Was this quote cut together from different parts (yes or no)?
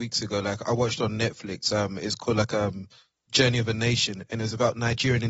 no